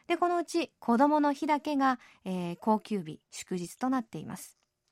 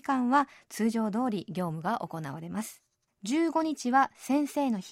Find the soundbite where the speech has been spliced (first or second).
second